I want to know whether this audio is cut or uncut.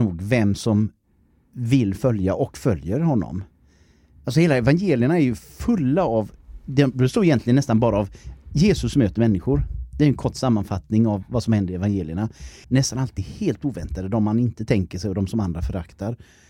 cut